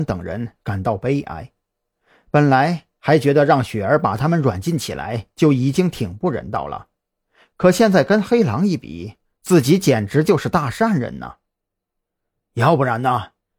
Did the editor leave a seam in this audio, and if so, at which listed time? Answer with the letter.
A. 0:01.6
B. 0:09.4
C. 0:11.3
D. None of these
D